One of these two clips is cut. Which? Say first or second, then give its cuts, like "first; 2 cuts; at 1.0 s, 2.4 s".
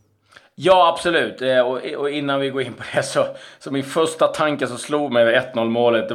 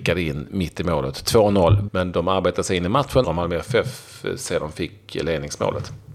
second; 2 cuts; at 1.9 s, 3.2 s